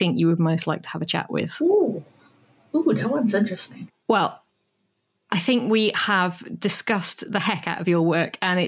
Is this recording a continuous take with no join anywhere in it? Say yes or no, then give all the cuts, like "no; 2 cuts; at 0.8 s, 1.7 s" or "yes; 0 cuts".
no; 1 cut; at 3.9 s